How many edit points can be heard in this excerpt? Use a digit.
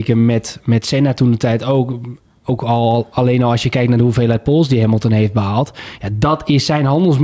0